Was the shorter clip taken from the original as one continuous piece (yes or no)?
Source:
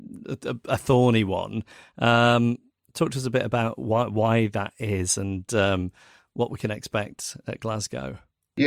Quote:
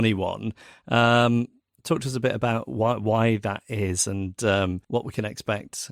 no